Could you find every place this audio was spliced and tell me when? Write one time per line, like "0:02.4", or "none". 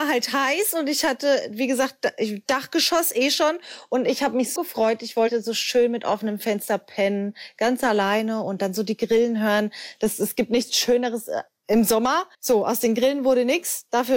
0:04.6
0:12.3